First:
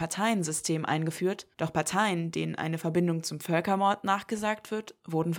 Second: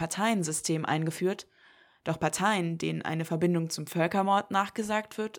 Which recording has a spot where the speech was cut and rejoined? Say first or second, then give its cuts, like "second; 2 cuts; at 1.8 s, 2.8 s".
first; 1 cut; at 1.5 s